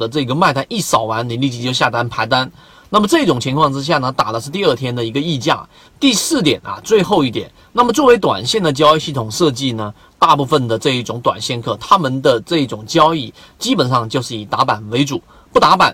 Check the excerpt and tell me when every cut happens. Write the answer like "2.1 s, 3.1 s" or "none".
5.8 s

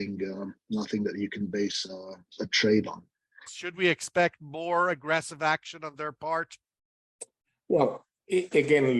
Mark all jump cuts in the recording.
3.5 s

